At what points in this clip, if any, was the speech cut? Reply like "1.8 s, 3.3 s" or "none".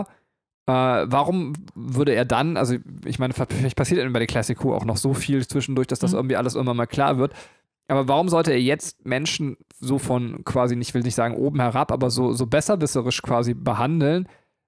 none